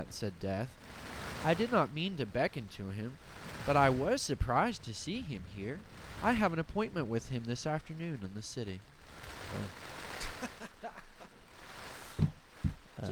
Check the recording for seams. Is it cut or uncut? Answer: uncut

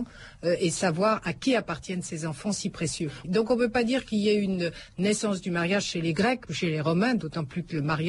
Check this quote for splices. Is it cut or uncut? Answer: cut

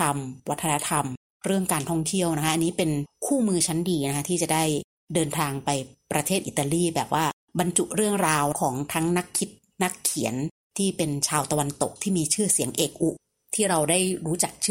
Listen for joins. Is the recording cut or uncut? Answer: uncut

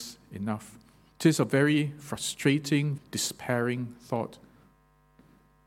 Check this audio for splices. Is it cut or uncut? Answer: cut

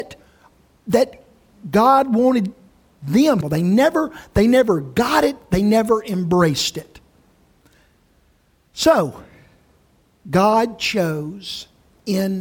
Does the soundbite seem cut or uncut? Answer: cut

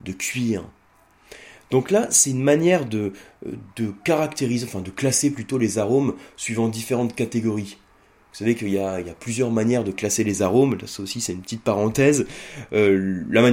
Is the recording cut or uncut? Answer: uncut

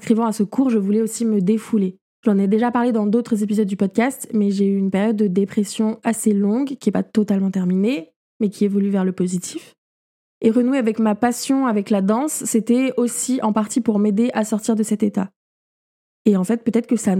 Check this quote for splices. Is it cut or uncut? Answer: uncut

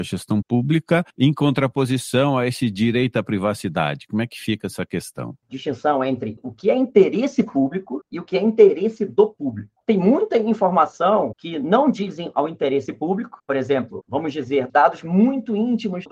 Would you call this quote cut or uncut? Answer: cut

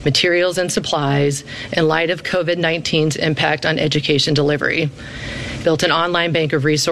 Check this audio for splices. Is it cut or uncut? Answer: cut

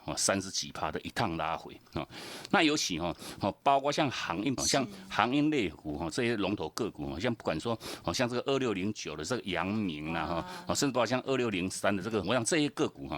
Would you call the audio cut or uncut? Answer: cut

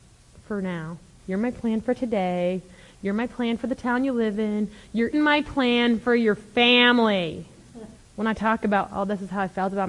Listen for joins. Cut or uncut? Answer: cut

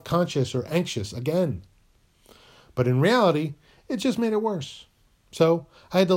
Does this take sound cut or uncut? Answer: uncut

